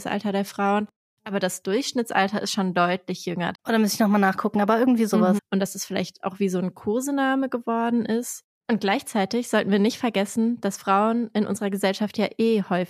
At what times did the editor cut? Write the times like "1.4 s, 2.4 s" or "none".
3.5 s, 5.4 s